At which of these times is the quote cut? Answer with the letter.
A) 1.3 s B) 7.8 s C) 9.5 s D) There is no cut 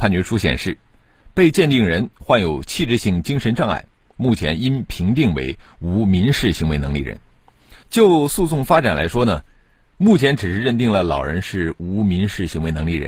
B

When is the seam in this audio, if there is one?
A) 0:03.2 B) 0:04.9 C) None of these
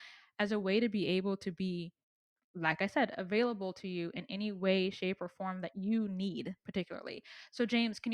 C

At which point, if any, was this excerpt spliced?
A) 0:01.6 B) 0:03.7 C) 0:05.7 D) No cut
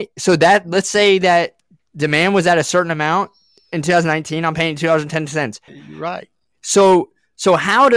C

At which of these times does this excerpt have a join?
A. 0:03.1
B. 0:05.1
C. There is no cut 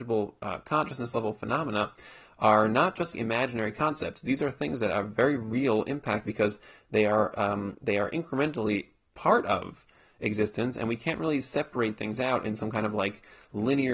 A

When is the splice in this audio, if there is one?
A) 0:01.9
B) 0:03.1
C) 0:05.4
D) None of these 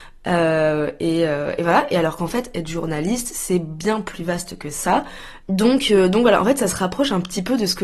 C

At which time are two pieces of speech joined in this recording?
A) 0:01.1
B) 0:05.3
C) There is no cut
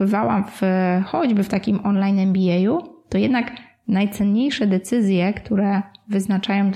C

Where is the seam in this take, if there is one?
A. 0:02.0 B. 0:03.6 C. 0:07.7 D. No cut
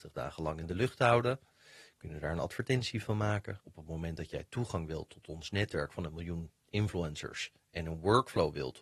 B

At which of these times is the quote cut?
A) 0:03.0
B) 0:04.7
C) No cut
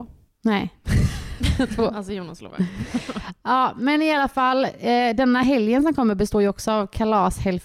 C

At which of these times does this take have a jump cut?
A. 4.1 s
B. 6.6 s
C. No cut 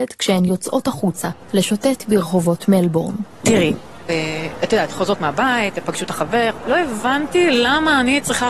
A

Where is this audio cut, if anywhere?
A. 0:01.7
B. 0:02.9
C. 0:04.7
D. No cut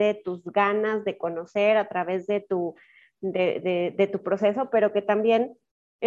D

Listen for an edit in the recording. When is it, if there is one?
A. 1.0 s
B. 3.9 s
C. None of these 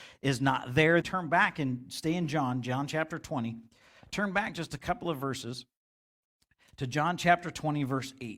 A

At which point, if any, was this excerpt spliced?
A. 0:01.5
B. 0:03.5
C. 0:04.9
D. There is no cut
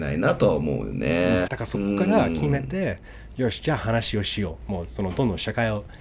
A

